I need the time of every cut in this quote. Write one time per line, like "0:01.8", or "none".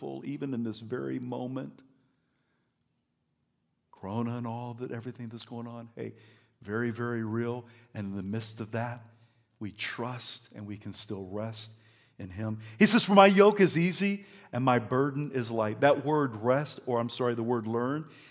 none